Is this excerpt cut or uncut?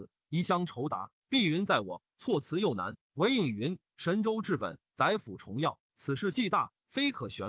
uncut